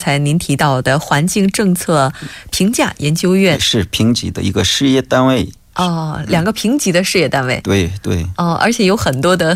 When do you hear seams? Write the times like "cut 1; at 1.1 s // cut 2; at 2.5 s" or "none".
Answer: cut 1; at 3.5 s